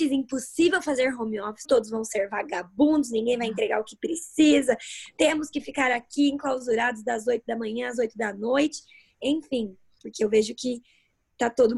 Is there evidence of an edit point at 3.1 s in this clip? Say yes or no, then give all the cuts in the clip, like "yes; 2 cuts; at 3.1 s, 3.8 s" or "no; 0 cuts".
no; 2 cuts; at 1.6 s, 10.0 s